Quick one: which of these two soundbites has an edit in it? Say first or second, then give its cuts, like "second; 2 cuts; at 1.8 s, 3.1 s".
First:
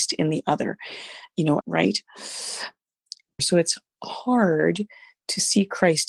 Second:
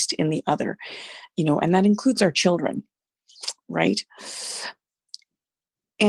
first; 2 cuts; at 1.6 s, 3.4 s